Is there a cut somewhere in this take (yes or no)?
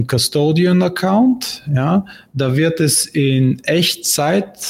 no